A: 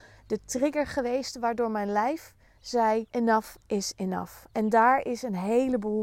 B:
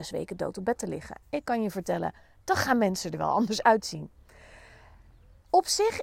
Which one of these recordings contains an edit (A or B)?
A